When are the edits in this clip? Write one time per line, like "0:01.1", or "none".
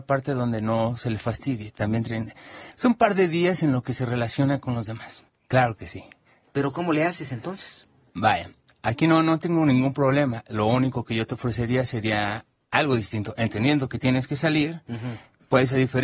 0:05.3

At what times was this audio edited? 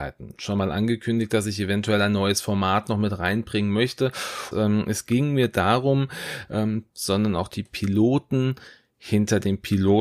0:04.5
0:06.9

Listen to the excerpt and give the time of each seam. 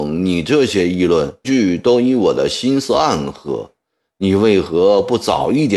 0:01.4

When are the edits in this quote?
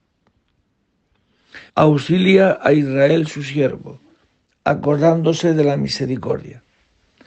0:01.7

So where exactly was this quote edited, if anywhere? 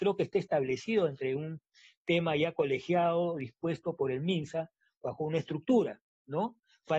none

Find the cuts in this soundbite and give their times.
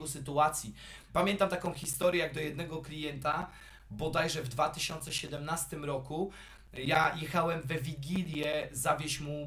0:01.1

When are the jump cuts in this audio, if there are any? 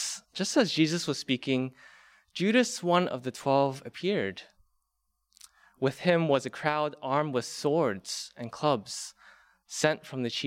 none

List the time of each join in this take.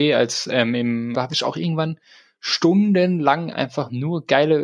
0:01.1

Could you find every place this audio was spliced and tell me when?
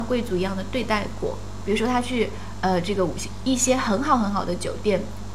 0:01.6

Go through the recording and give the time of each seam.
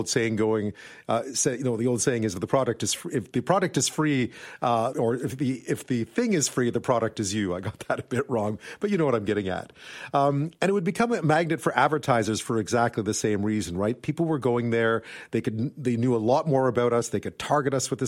0:04.9

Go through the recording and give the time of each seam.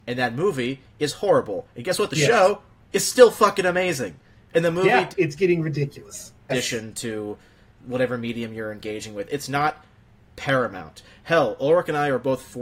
0:05.1
0:06.5

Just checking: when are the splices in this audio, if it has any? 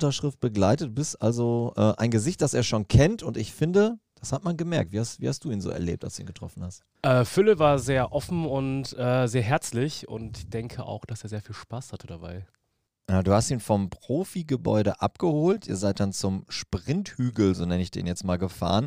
none

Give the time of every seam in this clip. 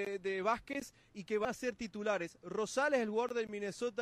none

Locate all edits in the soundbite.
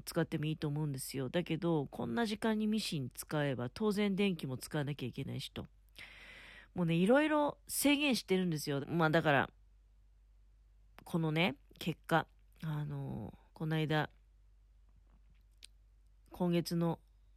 0:08.8
0:13.5

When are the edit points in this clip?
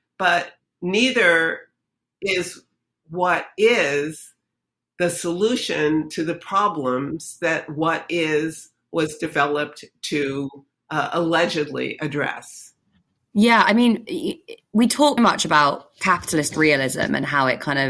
0:13.2
0:15.2

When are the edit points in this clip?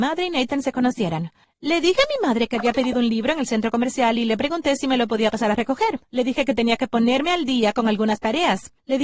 none

